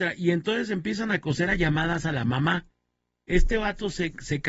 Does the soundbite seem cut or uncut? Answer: uncut